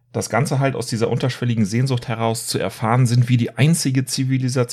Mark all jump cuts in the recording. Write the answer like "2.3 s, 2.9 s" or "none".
none